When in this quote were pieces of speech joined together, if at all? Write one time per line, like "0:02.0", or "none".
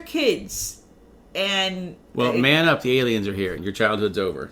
0:02.0
0:03.6